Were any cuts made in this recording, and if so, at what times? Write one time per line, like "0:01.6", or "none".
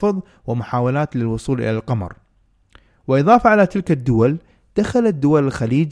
none